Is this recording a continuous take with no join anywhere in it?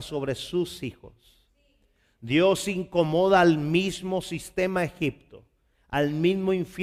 yes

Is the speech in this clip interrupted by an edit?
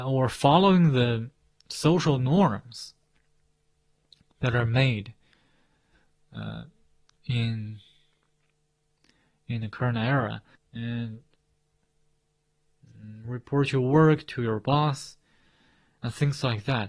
yes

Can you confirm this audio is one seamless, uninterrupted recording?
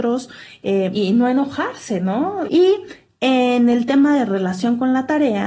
no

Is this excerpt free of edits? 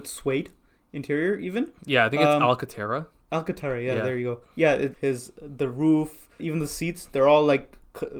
no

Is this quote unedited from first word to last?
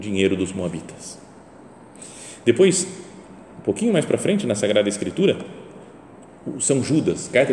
yes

